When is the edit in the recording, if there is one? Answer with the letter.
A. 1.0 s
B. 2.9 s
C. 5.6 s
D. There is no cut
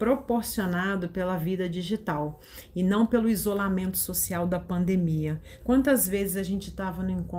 C